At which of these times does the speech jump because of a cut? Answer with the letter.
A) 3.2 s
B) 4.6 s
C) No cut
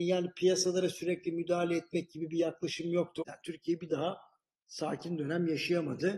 A